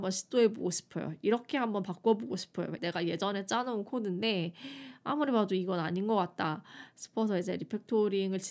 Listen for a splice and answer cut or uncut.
cut